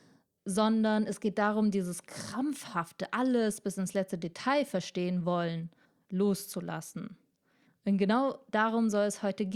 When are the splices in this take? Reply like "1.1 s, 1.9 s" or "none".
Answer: 7.7 s